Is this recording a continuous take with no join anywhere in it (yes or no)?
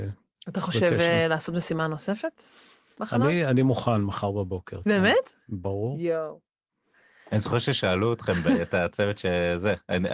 yes